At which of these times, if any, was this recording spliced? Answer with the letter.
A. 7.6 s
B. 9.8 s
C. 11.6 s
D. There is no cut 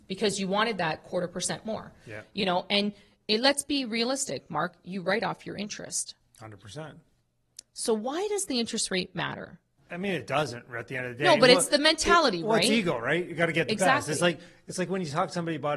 B